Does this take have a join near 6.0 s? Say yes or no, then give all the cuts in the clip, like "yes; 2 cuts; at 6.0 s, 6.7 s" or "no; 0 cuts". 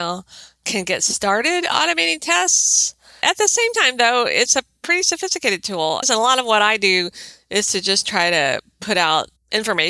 yes; 1 cut; at 6.0 s